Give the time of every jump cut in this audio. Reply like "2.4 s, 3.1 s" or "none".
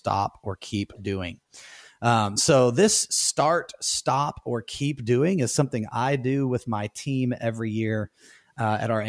none